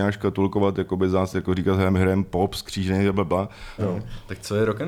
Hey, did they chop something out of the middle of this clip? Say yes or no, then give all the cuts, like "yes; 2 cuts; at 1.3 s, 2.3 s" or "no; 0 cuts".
yes; 1 cut; at 3.8 s